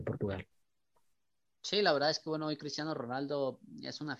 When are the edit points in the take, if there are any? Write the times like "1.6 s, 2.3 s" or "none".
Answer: none